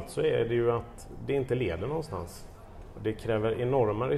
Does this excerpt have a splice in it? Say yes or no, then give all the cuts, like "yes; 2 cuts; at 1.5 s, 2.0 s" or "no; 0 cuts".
no; 0 cuts